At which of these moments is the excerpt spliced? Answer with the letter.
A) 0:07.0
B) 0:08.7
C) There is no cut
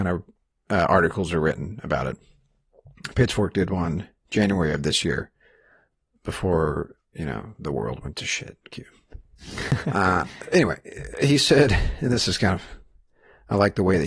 A